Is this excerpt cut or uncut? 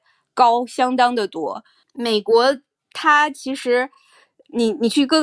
uncut